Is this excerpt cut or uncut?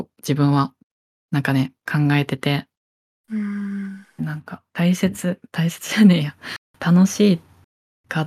cut